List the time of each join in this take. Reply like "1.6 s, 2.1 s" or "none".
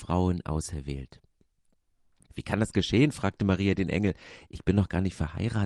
2.3 s